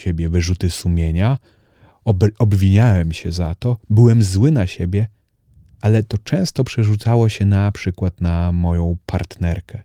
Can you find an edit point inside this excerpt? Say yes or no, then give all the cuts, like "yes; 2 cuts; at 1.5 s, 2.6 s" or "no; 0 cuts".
no; 0 cuts